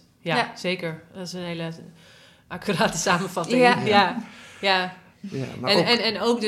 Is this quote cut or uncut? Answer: uncut